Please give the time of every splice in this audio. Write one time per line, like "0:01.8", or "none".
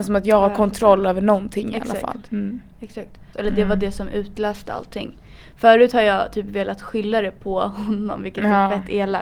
0:02.3
0:03.3